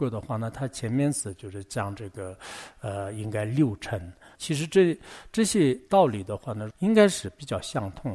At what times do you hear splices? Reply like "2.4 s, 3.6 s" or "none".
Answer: 4.3 s, 6.7 s

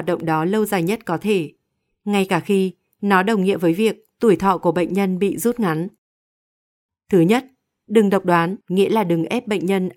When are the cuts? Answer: 6.9 s, 8.6 s

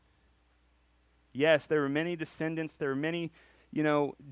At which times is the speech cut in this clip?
none

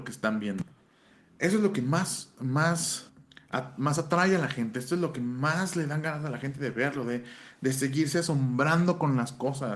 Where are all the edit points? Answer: none

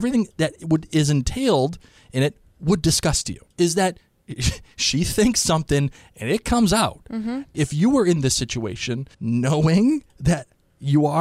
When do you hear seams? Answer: 3.5 s, 7.5 s, 9.1 s

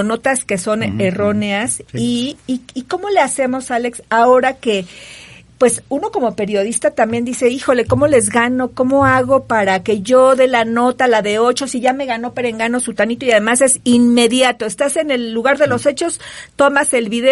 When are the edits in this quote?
none

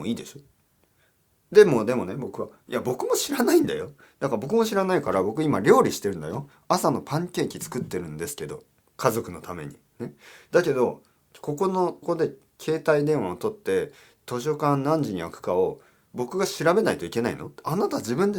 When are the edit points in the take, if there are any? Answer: 12.0 s

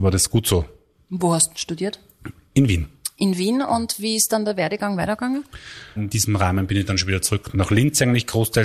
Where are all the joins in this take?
6.0 s, 7.5 s

